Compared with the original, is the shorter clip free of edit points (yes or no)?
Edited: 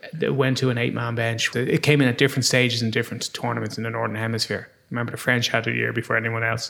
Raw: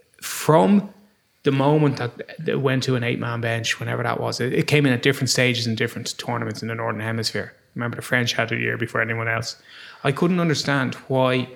no